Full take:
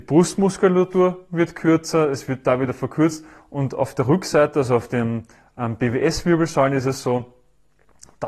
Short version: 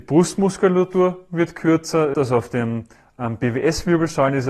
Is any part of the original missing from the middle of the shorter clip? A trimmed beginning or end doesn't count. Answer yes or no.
yes